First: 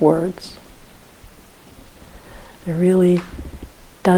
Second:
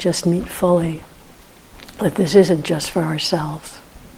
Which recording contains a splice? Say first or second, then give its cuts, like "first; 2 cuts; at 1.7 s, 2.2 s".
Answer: first; 1 cut; at 2.6 s